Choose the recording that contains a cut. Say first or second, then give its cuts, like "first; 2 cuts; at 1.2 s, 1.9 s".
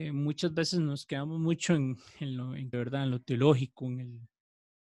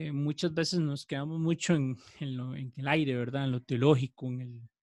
first; 1 cut; at 2.7 s